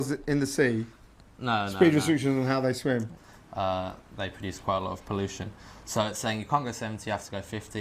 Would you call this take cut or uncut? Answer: cut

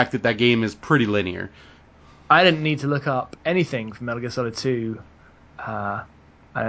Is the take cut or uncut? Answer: uncut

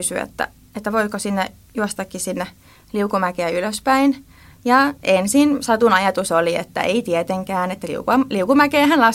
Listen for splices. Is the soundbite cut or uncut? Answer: uncut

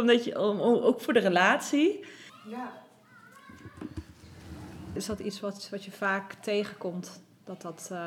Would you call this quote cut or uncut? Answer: cut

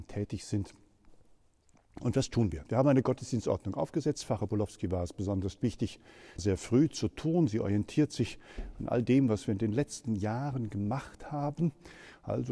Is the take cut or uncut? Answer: cut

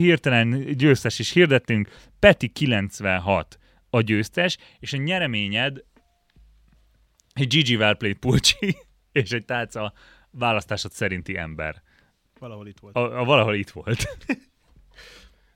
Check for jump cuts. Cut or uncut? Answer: uncut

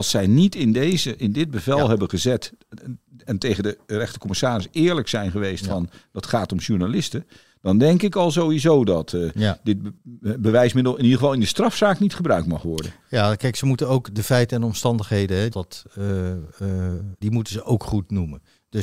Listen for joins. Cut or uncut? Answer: cut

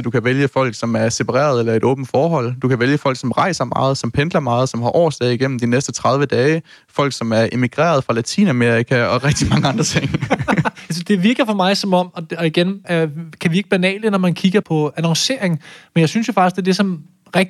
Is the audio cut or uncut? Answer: cut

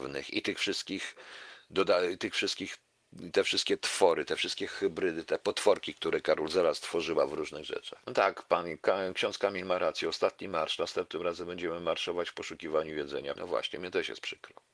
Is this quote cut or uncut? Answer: cut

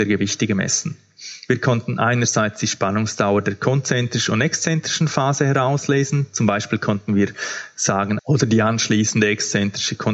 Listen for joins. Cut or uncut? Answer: cut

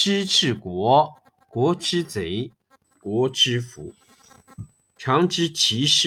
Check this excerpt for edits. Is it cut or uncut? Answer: cut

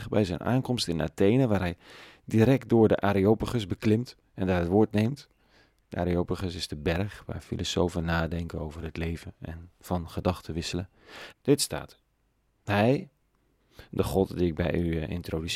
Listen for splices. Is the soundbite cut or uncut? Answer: cut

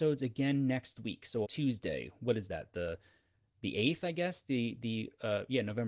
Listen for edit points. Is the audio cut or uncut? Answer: cut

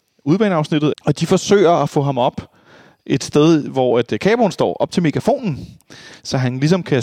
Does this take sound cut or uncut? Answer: cut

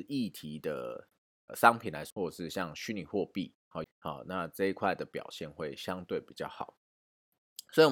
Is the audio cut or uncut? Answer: cut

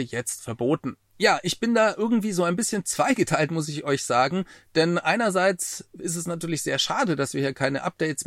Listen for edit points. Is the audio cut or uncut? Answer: uncut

